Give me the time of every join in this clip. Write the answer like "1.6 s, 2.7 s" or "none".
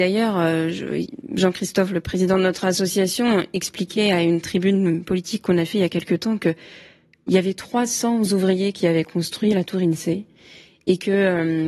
none